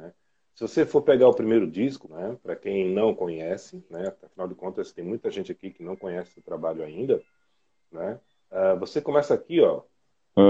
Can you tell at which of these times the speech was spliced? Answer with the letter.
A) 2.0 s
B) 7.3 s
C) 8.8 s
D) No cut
A